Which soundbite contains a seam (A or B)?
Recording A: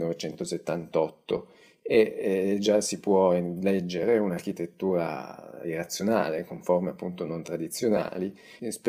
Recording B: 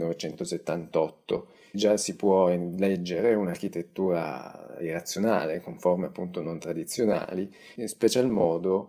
B